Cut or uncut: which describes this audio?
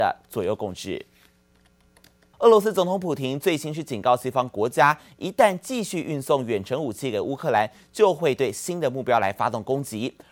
cut